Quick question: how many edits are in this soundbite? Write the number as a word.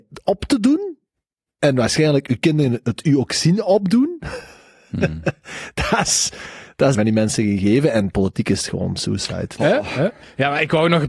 two